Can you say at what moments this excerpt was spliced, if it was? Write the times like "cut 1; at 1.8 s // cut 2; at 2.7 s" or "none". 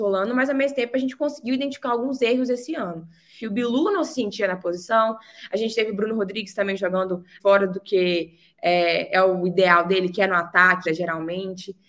cut 1; at 3.4 s // cut 2; at 7.4 s // cut 3; at 10.9 s